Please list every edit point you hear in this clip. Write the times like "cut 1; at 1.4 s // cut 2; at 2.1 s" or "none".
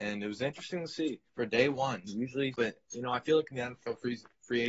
cut 1; at 1.3 s // cut 2; at 2.5 s

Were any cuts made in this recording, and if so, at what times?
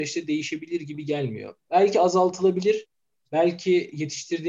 none

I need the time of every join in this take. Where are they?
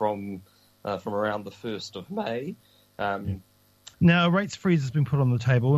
cut 1; at 3.9 s

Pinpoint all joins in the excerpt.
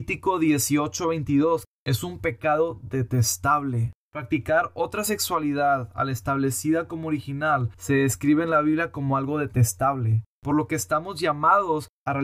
cut 1; at 1.7 s

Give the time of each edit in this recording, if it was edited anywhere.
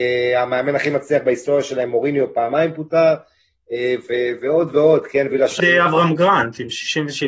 cut 1; at 5.6 s

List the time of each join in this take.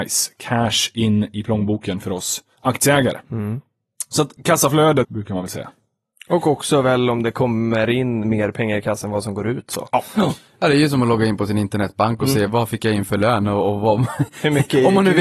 cut 1; at 5.0 s

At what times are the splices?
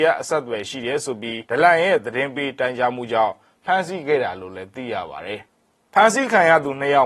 cut 1; at 1.4 s // cut 2; at 5.4 s

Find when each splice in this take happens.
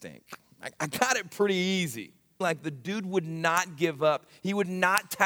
cut 1; at 2.4 s

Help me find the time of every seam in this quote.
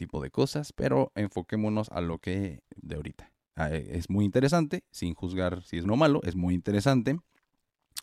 cut 1; at 2.8 s // cut 2; at 5.8 s

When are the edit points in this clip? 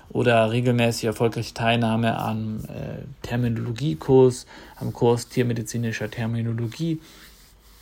none

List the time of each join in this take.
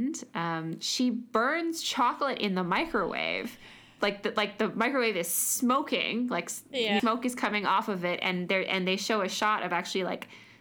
cut 1; at 7.0 s

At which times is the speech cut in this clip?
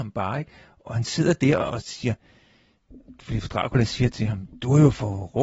none

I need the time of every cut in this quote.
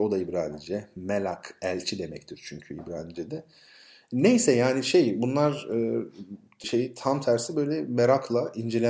cut 1; at 6.6 s

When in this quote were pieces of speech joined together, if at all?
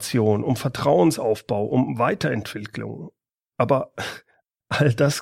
none

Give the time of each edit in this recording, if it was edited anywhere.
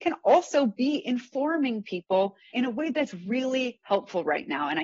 cut 1; at 2.5 s

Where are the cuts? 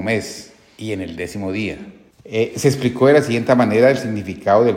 cut 1; at 2.1 s

